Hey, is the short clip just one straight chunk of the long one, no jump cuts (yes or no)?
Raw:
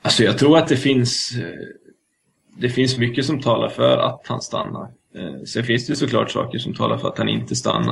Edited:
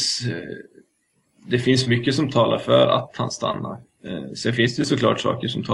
yes